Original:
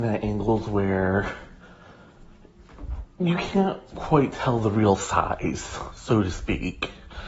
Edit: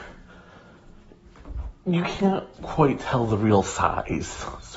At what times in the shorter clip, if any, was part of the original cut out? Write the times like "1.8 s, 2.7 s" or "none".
none